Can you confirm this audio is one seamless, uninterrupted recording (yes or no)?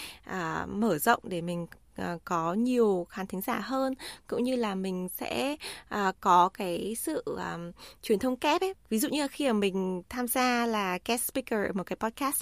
yes